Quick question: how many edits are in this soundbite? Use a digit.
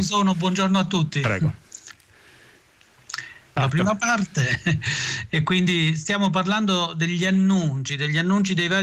1